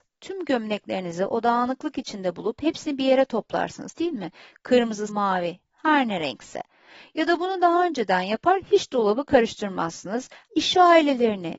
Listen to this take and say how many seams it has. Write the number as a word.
two